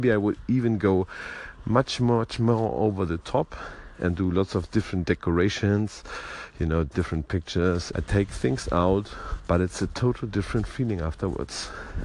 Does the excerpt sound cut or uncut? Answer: cut